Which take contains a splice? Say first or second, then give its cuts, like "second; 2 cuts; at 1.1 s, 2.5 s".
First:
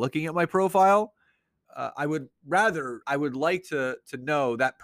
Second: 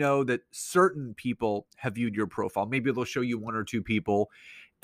first; 2 cuts; at 1.7 s, 3.0 s